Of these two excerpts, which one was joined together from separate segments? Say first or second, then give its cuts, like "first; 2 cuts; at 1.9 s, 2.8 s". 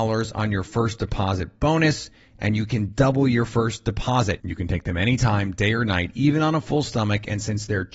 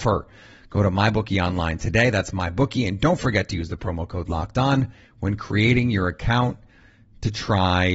first; 1 cut; at 4.4 s